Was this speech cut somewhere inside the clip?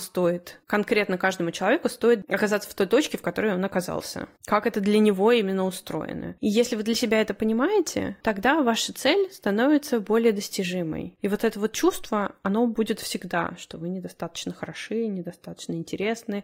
yes; 1 cut; at 11.2 s

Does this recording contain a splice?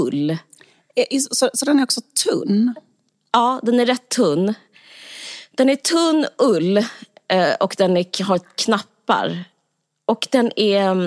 no; 0 cuts

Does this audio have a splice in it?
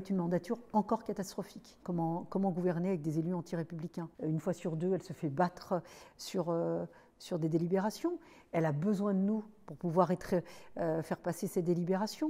yes; 2 cuts; at 1.8 s, 4.1 s

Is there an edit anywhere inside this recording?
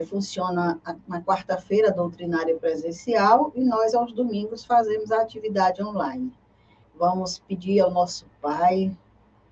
yes; 1 cut; at 6.8 s

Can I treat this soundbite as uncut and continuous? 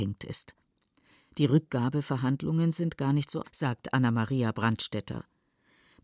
no; 1 cut; at 3.4 s

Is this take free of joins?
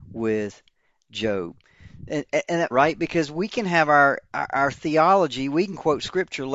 no; 1 cut; at 2.7 s

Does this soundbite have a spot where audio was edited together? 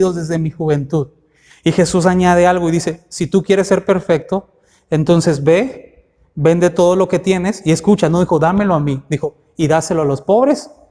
no; 0 cuts

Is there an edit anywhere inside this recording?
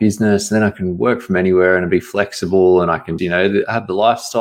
yes; 1 cut; at 3.2 s

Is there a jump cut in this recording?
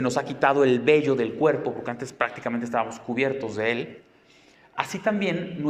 no; 0 cuts

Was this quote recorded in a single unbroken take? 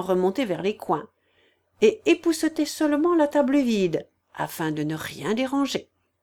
yes; 0 cuts

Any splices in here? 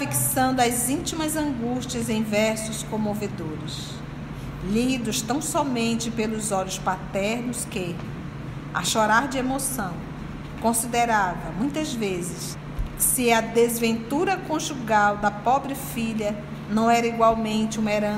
no; 0 cuts

